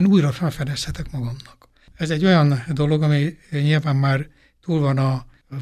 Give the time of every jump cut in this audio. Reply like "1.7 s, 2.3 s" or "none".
1.9 s